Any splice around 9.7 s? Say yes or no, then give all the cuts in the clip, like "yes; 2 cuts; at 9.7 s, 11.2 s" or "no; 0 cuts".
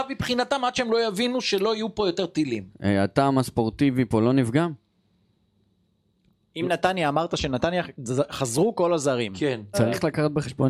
yes; 1 cut; at 9.7 s